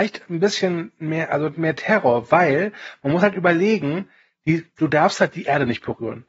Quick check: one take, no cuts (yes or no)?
yes